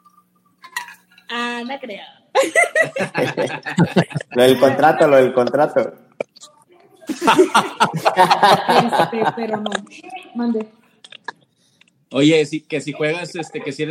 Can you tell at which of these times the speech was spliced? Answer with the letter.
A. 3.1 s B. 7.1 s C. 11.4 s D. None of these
B